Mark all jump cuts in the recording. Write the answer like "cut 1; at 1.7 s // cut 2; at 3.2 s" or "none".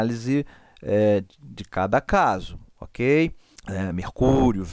cut 1; at 3.5 s